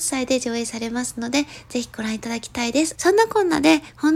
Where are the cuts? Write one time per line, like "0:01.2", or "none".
0:03.0